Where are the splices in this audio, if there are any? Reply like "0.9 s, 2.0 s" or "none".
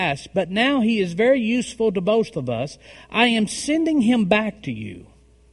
none